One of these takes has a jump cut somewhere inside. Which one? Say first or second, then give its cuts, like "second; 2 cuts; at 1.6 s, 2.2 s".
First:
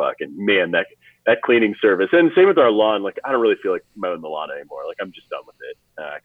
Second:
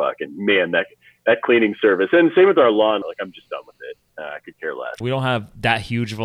second; 2 cuts; at 3.0 s, 5.0 s